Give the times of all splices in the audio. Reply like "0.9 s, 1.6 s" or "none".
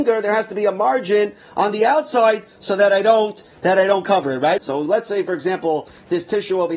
4.6 s